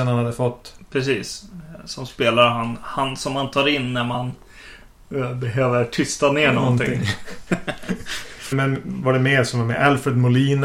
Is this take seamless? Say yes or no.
no